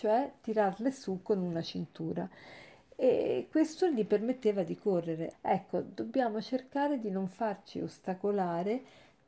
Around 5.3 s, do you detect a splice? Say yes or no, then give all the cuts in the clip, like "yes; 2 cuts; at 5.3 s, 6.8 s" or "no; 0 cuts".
yes; 1 cut; at 5.3 s